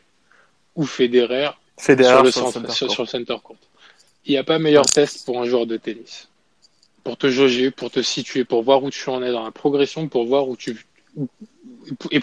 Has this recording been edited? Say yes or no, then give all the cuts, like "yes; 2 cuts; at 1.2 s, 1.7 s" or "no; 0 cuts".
no; 0 cuts